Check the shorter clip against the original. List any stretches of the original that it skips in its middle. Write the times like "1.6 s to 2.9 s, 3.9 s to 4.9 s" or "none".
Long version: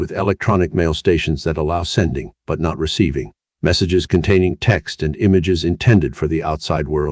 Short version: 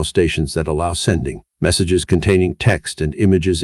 2.4 s to 3.5 s